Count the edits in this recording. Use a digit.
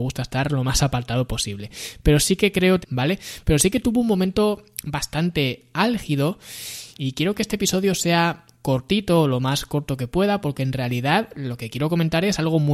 2